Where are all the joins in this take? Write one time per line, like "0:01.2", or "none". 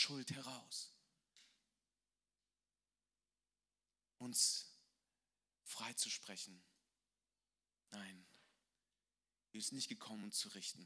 0:07.7